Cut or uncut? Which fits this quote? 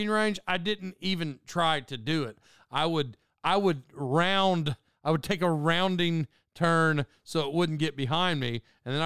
uncut